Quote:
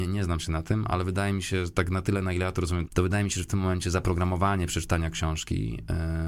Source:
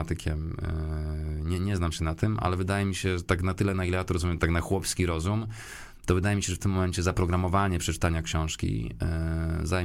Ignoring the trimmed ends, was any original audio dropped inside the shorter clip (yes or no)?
yes